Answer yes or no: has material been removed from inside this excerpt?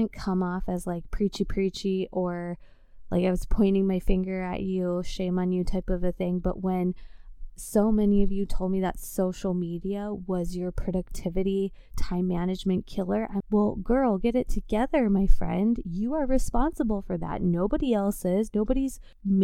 yes